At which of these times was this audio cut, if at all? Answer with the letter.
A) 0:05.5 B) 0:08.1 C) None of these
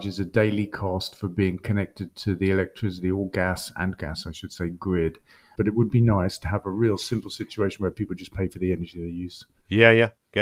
A